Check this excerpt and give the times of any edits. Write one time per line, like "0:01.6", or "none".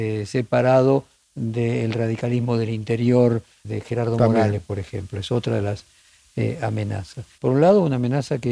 0:03.6
0:07.4